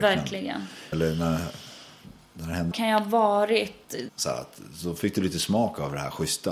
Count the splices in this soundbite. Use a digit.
3